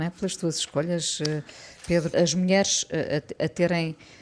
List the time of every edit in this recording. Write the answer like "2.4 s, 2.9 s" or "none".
2.1 s